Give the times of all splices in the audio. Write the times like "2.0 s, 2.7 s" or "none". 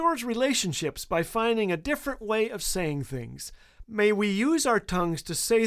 3.8 s